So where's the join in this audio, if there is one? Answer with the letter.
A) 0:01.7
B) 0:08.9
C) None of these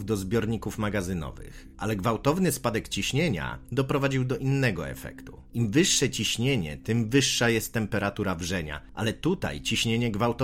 C